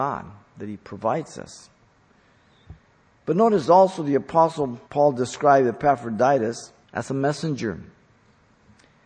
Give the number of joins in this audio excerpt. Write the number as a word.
two